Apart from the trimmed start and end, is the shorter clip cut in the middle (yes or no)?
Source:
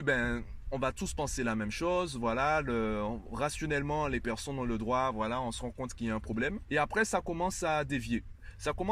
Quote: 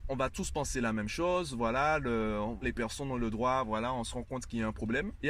yes